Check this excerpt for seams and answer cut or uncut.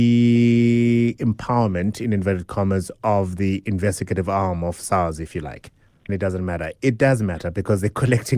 cut